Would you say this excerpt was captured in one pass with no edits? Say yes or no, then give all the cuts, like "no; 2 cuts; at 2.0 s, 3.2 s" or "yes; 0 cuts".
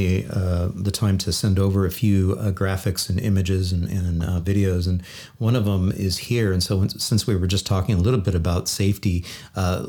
yes; 0 cuts